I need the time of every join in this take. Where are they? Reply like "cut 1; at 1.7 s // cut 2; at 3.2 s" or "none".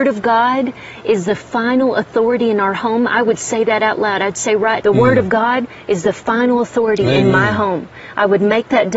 cut 1; at 4.8 s